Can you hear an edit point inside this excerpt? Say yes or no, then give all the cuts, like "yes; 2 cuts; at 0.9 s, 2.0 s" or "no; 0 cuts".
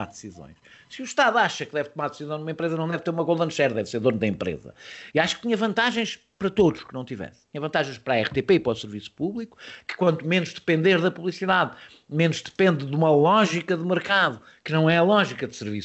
yes; 1 cut; at 5.1 s